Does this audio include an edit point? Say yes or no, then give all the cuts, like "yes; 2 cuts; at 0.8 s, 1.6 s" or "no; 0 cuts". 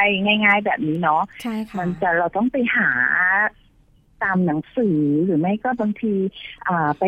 no; 0 cuts